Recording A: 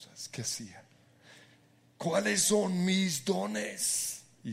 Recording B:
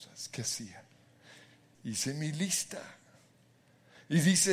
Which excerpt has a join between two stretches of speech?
B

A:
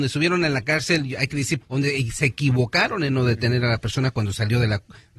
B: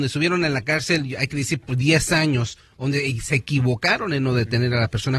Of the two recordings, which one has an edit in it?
A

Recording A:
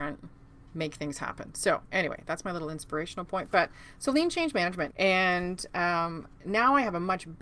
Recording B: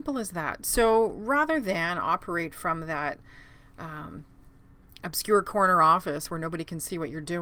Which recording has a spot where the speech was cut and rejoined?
A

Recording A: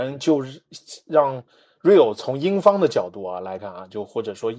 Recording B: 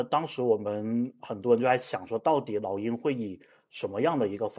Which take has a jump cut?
A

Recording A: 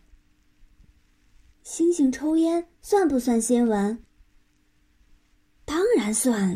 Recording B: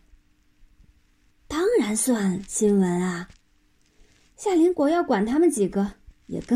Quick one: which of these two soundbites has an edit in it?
B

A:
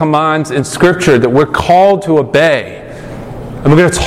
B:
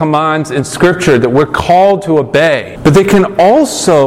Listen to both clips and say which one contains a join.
B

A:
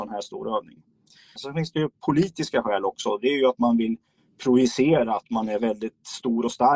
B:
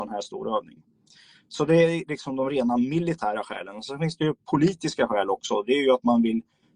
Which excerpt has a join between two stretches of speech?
A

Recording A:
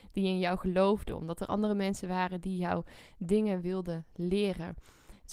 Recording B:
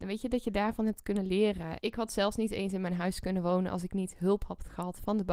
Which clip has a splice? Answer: B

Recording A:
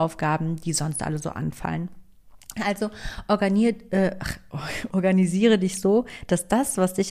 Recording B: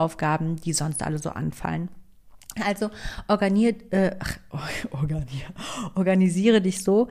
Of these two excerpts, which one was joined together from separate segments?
A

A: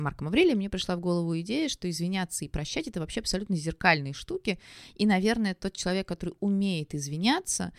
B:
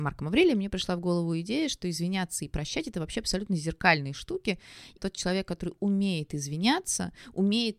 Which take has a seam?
B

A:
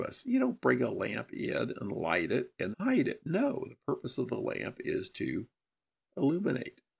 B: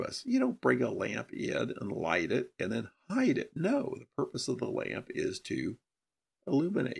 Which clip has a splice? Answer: A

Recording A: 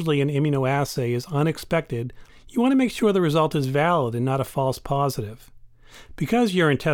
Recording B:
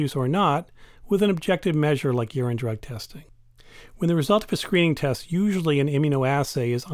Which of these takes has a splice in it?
A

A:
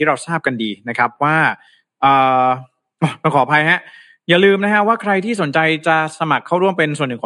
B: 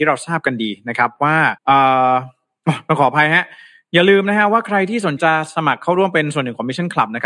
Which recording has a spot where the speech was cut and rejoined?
B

